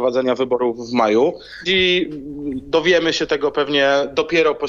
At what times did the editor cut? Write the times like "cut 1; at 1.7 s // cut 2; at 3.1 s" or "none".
cut 1; at 1.7 s